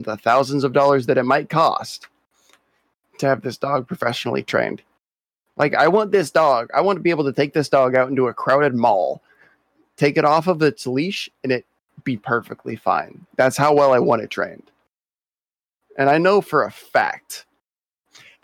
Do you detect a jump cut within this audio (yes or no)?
no